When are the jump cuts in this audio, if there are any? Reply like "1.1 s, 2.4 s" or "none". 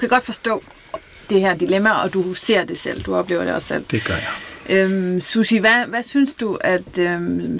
none